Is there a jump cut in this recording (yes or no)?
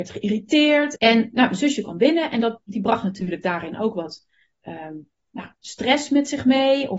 yes